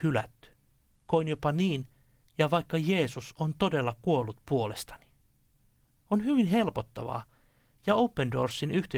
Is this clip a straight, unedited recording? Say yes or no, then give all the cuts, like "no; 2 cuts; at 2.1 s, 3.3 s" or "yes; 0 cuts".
no; 2 cuts; at 2.2 s, 7.7 s